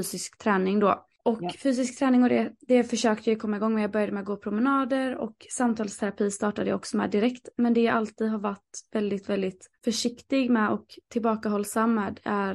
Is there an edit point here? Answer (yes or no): yes